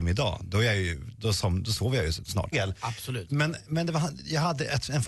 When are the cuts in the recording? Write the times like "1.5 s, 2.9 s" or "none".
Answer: 2.5 s